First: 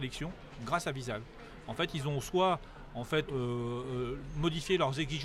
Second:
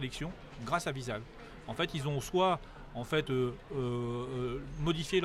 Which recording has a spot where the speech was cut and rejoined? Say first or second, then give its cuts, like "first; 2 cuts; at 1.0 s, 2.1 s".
first; 1 cut; at 3.3 s